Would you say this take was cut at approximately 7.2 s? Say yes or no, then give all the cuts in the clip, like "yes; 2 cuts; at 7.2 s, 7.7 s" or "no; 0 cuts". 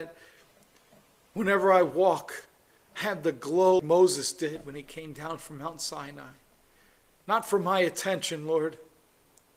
no; 1 cut; at 3.8 s